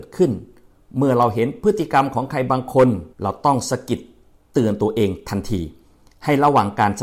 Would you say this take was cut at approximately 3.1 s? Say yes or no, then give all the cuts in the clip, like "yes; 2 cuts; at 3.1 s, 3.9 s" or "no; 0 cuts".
yes; 1 cut; at 3.1 s